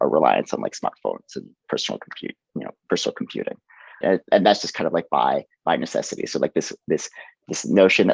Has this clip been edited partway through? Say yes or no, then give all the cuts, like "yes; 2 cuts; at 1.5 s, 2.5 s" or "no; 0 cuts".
yes; 1 cut; at 4.0 s